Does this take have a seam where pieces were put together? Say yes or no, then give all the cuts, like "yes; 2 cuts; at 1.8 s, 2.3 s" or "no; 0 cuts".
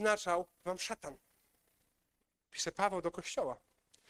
no; 0 cuts